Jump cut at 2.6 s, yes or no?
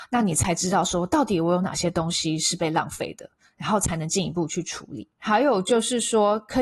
no